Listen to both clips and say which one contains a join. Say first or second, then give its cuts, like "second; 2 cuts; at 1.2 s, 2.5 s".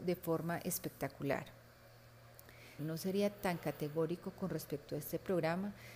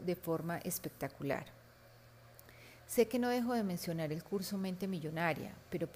first; 1 cut; at 2.8 s